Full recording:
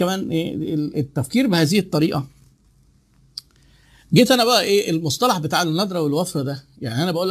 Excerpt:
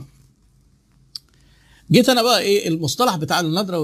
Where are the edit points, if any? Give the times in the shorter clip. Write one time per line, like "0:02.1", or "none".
none